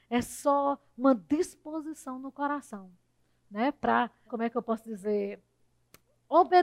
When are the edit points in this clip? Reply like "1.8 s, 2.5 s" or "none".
4.3 s